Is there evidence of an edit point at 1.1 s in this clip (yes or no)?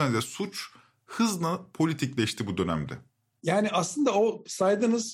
no